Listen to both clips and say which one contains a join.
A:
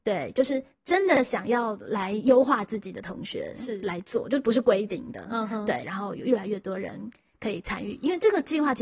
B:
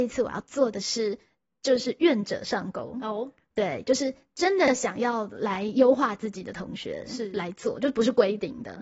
A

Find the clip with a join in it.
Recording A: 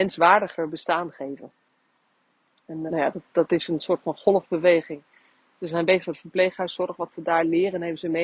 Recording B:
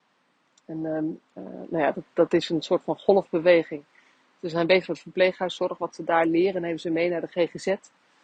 A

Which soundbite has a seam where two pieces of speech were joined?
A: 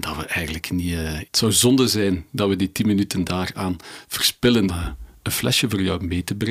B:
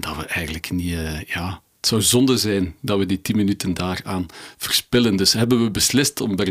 A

